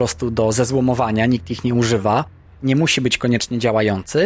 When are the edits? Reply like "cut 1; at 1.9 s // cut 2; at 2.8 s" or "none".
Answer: cut 1; at 2.5 s